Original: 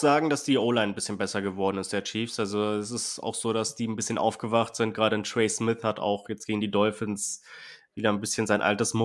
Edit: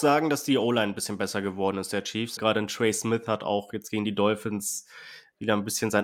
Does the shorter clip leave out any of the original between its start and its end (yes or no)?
yes